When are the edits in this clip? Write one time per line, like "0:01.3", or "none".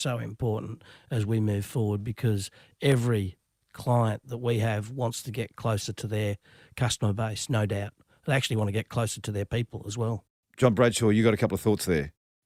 none